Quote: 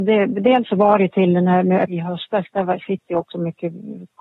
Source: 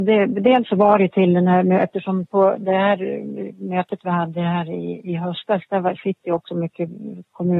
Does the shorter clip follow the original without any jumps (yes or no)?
no